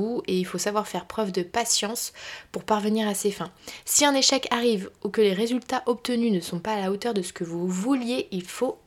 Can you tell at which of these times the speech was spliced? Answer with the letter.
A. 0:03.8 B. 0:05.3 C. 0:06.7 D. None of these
D